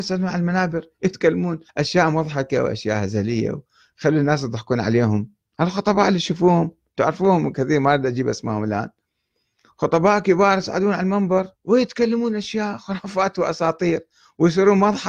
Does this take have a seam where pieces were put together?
yes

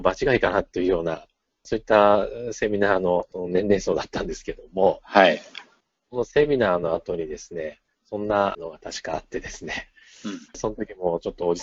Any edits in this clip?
yes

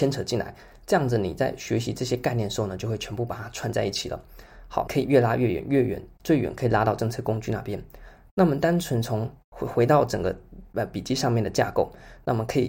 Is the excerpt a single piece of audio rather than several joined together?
no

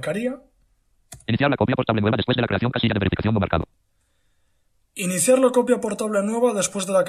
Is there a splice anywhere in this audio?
no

